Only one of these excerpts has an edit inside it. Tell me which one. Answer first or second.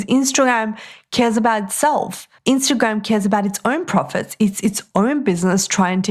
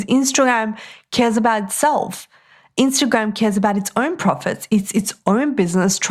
first